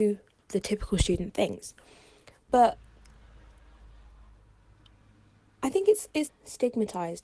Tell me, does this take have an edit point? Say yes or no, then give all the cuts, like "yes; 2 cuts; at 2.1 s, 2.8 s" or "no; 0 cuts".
yes; 2 cuts; at 2.5 s, 6.3 s